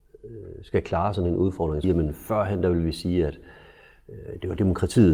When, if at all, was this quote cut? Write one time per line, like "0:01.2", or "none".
0:01.8